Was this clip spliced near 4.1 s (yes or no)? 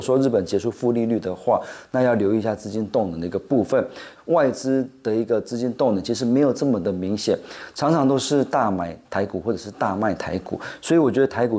yes